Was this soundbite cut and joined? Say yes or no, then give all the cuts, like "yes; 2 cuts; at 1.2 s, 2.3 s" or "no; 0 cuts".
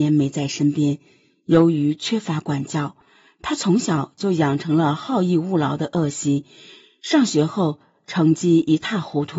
no; 0 cuts